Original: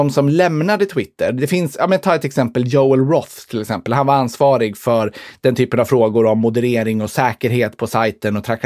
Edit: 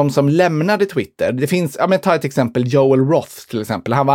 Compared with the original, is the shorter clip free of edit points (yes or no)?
yes